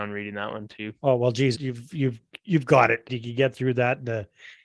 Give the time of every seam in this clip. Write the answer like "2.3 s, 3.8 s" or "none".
1.5 s, 3.1 s